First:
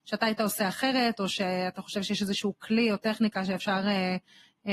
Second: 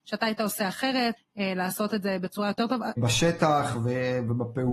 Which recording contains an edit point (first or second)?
second